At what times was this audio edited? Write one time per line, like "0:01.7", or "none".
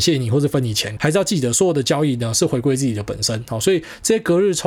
0:01.0